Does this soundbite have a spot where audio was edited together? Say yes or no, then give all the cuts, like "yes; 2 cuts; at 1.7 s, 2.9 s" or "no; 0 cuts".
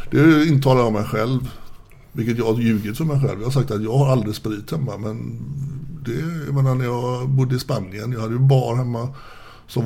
no; 0 cuts